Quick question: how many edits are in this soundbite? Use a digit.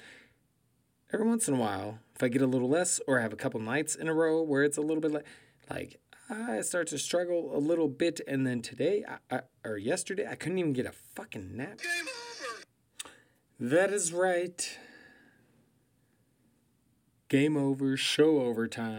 1